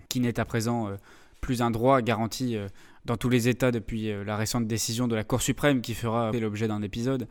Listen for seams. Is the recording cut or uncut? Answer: cut